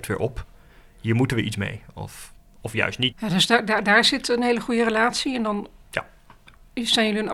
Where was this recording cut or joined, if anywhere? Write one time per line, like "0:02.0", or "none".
0:03.1